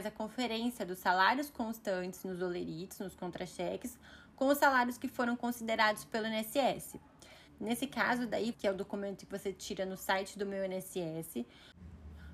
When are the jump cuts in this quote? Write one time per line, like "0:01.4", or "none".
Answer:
0:07.5
0:08.5

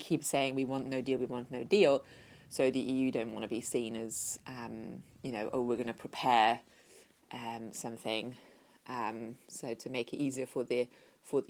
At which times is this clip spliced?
none

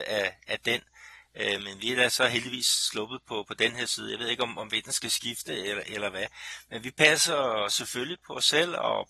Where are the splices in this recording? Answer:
none

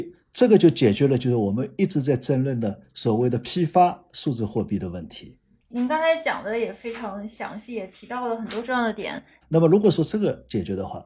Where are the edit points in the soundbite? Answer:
0:05.6
0:09.4

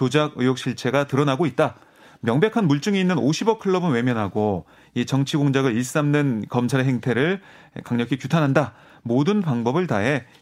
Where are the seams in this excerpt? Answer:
none

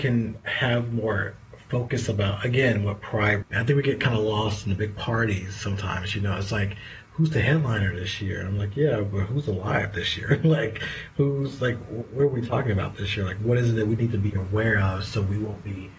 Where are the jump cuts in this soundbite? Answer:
0:03.4

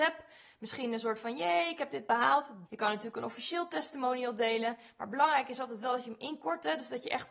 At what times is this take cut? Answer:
0:02.7

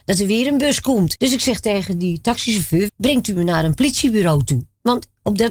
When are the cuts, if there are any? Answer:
0:01.2
0:02.9

